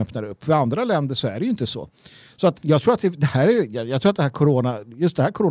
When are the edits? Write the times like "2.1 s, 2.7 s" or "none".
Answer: 2.5 s